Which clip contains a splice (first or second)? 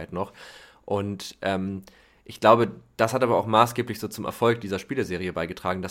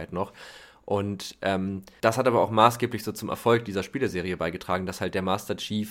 second